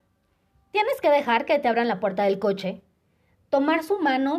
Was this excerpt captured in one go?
yes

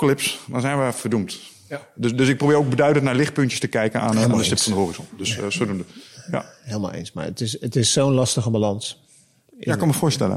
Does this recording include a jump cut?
no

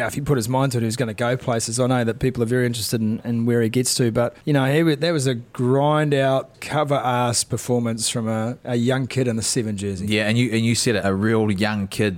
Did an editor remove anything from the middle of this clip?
yes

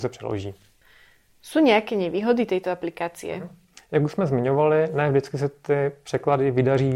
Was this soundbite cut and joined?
no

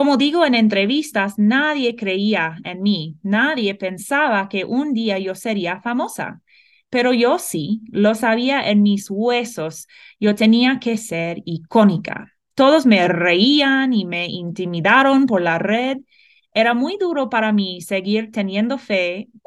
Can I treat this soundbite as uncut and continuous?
yes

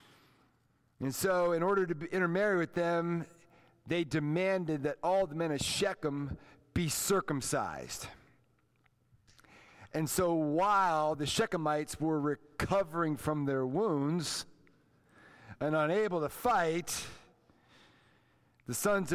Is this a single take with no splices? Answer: yes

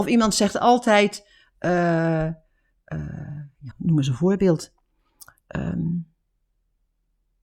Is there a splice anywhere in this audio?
yes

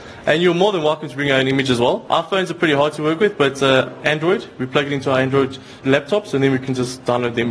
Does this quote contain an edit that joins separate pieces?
yes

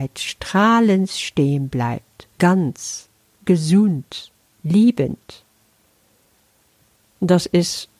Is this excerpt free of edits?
no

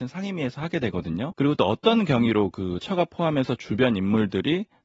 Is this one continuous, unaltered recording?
no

